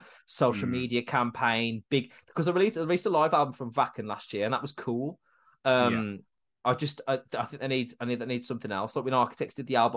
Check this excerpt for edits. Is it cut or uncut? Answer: uncut